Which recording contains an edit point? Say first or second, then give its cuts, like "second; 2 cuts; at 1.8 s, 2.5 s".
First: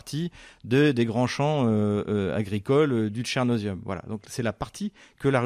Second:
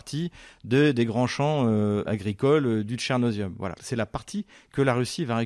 second; 2 cuts; at 2.1 s, 3.8 s